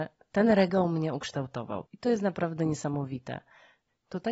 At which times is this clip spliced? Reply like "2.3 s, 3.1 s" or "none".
1.9 s